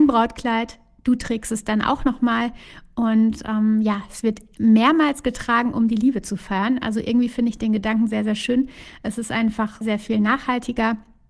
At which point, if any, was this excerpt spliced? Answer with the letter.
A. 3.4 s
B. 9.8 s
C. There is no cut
B